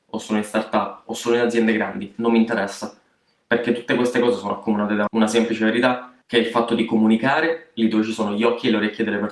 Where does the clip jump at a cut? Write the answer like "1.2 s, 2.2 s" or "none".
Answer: 5.1 s, 6.2 s